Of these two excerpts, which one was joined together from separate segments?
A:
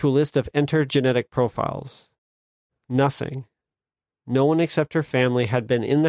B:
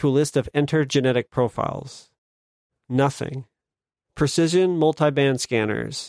B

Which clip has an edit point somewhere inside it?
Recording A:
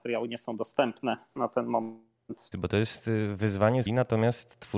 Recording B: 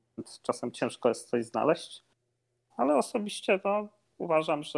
A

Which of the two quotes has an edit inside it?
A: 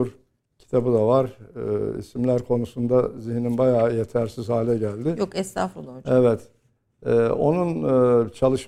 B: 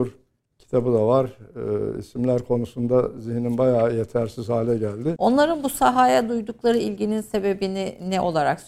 B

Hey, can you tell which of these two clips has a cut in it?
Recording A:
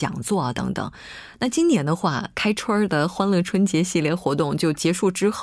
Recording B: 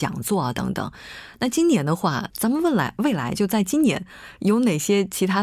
B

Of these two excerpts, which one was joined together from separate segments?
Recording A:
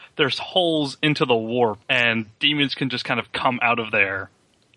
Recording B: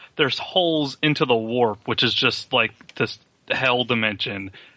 A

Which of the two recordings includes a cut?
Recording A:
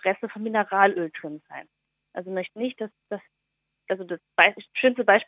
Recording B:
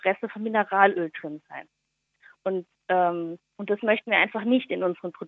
A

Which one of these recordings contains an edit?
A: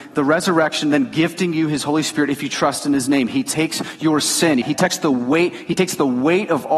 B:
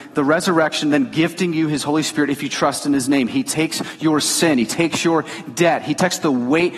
A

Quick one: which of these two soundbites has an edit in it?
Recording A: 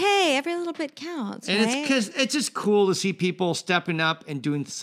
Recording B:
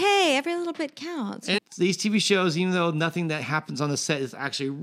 B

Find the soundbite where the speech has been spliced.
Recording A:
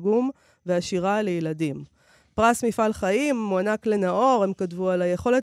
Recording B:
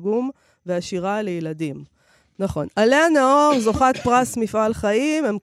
B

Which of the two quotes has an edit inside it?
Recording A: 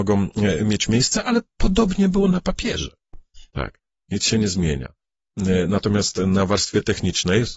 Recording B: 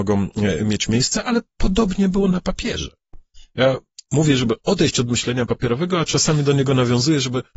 A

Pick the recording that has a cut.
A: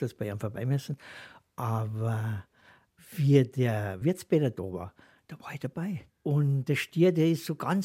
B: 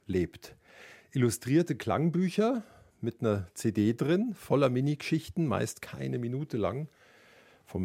A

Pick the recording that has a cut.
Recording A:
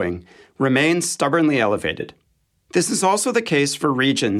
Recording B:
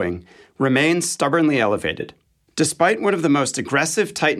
B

